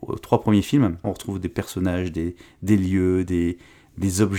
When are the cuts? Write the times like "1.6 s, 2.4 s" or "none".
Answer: 1.0 s